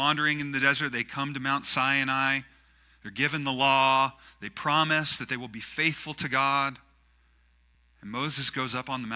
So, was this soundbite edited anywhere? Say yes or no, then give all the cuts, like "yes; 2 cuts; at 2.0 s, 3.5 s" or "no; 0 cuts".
no; 0 cuts